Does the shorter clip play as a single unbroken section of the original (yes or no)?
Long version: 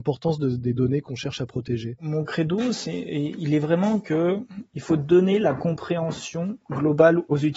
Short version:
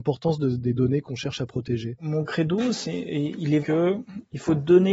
no